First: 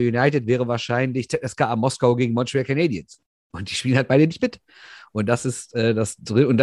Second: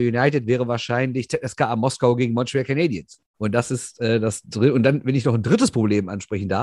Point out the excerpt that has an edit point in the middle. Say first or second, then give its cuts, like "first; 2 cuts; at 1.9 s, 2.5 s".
second; 1 cut; at 3.3 s